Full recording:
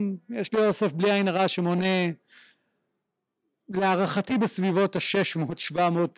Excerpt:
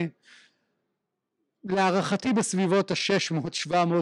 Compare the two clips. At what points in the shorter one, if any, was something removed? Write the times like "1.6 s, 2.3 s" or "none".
none